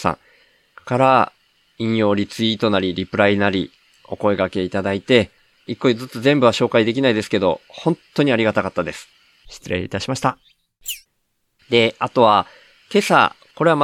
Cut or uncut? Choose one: cut